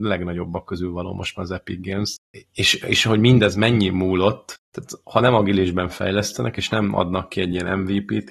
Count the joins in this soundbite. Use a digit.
0